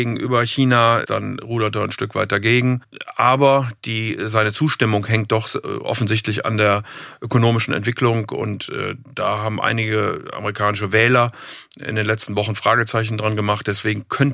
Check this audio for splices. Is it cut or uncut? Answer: cut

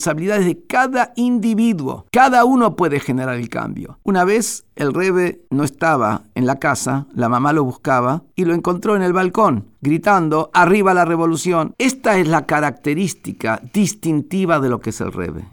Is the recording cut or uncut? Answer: cut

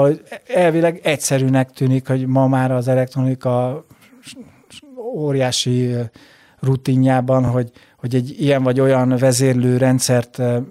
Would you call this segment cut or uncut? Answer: uncut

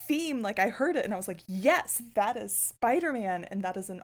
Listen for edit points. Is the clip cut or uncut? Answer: uncut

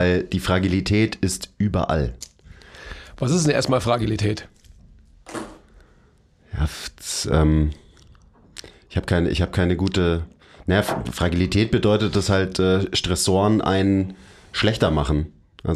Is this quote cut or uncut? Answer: uncut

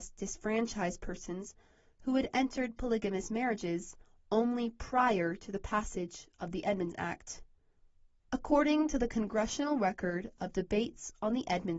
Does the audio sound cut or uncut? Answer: cut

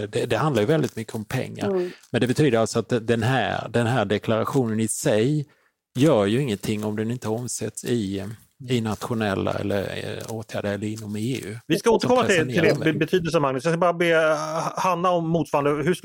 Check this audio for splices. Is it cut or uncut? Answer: uncut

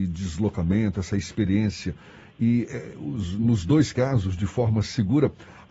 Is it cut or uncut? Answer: uncut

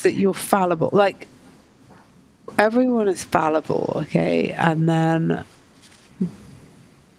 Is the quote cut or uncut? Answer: uncut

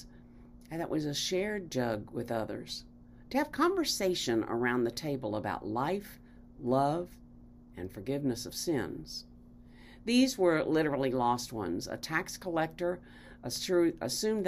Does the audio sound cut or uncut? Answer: uncut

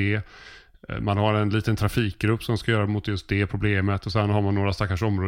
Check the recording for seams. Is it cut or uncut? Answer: uncut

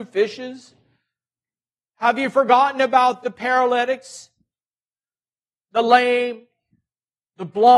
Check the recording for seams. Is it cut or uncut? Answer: cut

